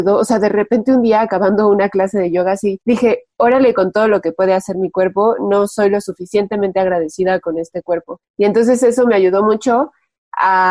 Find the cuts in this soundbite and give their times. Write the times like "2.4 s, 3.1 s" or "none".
none